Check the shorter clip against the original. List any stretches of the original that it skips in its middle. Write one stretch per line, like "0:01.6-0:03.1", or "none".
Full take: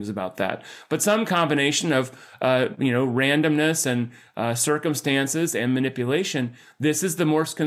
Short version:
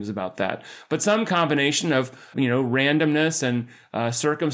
0:02.3-0:02.8